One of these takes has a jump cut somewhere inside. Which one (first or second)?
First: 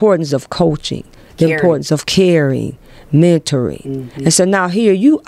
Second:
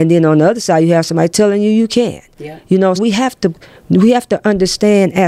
second